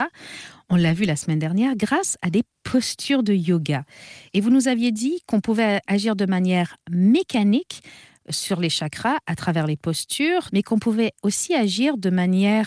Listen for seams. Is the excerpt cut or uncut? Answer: cut